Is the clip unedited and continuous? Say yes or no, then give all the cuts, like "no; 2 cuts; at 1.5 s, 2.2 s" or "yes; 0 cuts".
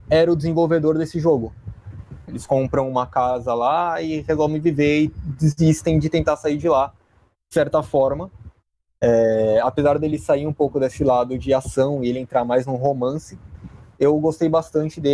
no; 2 cuts; at 2.3 s, 9.0 s